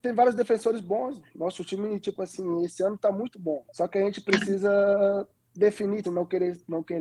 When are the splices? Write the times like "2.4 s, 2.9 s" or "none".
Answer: 3.7 s, 6.0 s